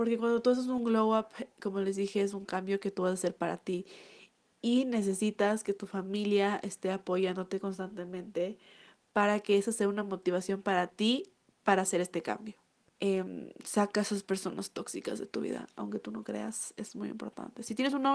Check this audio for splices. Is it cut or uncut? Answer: cut